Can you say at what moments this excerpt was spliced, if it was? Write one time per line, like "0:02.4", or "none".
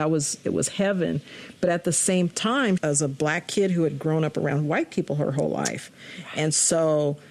0:02.8